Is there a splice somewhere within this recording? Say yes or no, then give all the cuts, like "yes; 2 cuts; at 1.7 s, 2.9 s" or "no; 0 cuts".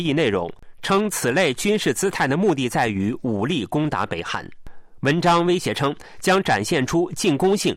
no; 0 cuts